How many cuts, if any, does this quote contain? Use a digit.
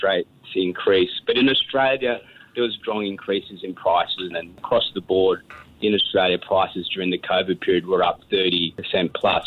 2